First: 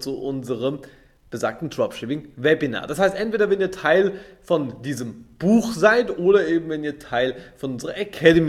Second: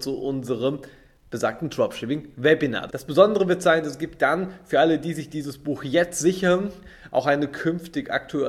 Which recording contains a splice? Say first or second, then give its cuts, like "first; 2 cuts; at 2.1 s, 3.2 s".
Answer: second; 1 cut; at 2.9 s